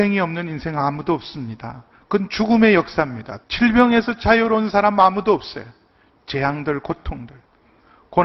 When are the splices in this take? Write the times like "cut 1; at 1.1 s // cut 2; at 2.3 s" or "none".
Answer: cut 1; at 3.4 s // cut 2; at 6.1 s